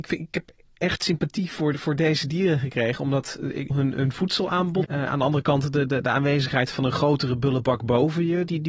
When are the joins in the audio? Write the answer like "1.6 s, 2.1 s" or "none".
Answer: 3.7 s, 4.8 s